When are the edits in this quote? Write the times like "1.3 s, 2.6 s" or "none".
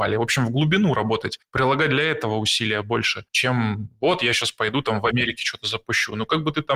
none